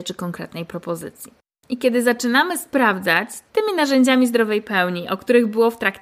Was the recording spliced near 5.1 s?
no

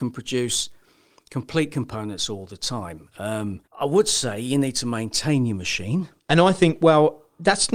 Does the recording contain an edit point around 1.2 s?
no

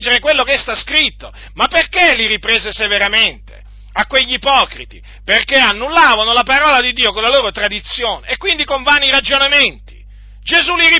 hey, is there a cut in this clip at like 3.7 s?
no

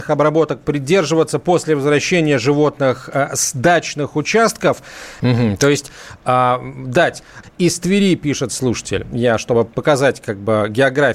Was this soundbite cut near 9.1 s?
no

